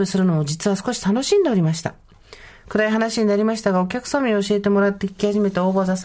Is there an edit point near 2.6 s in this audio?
yes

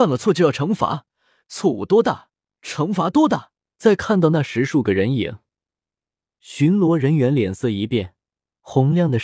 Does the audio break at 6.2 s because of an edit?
no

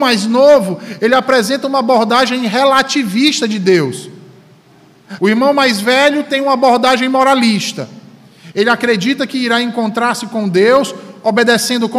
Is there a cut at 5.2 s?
yes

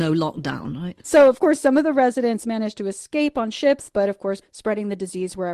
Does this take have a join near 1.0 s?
yes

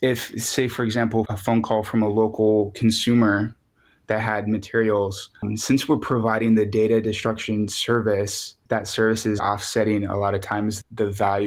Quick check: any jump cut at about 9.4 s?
yes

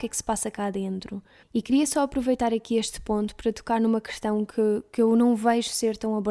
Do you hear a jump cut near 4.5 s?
no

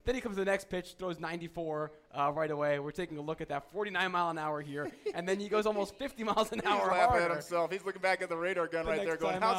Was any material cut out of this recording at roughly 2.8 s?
no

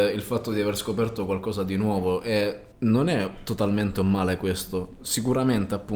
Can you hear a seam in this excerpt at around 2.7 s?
yes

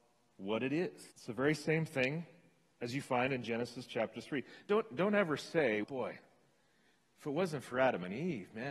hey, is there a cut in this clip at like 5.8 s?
yes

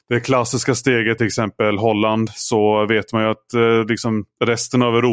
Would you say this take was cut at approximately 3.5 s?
no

